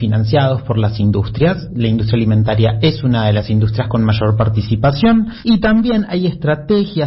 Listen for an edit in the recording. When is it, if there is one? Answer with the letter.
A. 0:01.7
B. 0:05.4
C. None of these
C